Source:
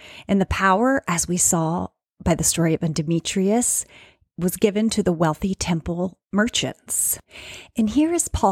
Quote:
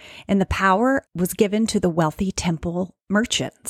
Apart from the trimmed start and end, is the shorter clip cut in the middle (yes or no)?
yes